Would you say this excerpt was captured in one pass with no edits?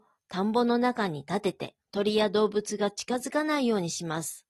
no; 1 cut; at 1.8 s

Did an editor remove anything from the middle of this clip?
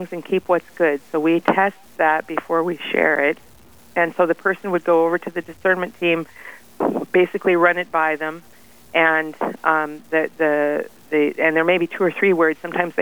no; 0 cuts

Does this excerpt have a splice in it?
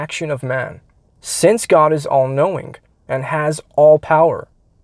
yes; 1 cut; at 1.1 s

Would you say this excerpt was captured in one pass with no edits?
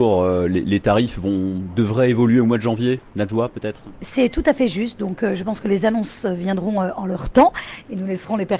yes; 0 cuts

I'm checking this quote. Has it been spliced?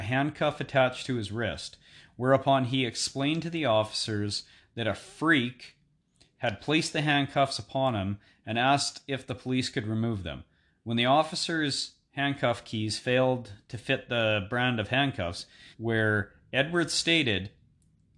yes; 1 cut; at 15.7 s

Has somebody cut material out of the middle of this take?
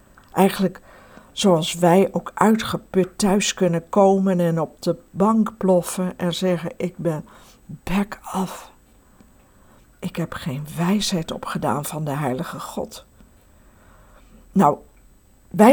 yes; 1 cut; at 9.8 s

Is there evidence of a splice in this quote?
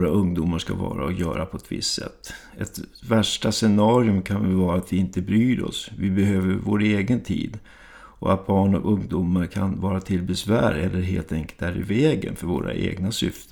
no; 0 cuts

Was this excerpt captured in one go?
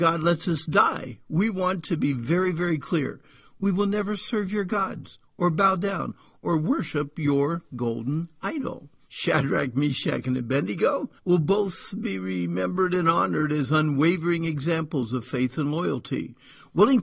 no; 2 cuts; at 9.1 s, 11.2 s

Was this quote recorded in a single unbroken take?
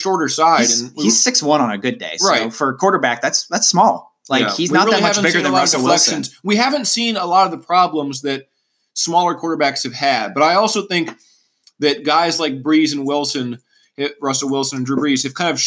yes; 0 cuts

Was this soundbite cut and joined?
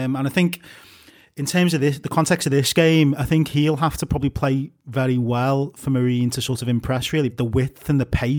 yes; 1 cut; at 7.3 s

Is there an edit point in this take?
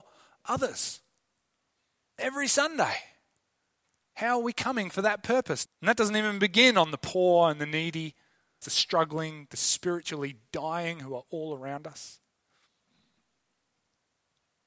yes; 2 cuts; at 5.6 s, 8.6 s

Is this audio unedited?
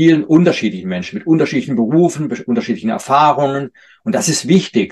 yes; 0 cuts

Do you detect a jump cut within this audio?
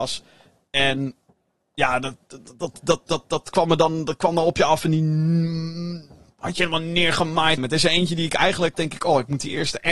yes; 2 cuts; at 7.6 s, 8.7 s

